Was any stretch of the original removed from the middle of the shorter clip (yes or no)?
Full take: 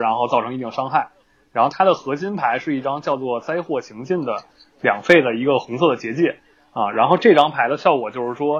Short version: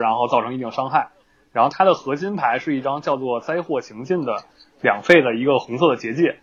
no